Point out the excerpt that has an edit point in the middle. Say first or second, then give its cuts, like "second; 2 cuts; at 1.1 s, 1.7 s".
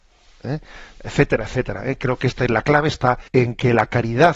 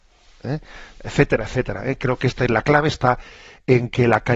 first; 1 cut; at 3.3 s